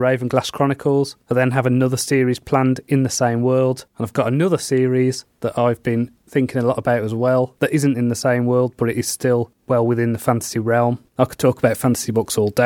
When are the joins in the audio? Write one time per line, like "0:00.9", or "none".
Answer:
0:11.1